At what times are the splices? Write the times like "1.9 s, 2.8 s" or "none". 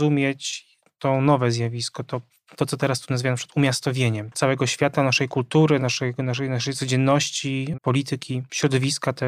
5.8 s, 7.7 s